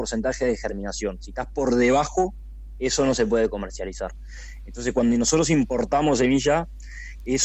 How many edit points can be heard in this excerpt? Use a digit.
0